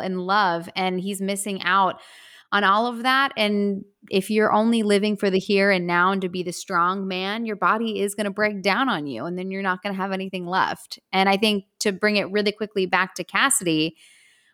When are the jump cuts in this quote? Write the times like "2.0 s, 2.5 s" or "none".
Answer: none